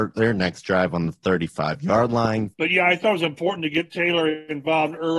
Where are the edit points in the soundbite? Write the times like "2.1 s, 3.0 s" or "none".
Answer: 2.5 s